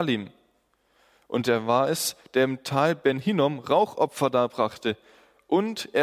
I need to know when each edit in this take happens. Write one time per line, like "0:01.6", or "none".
none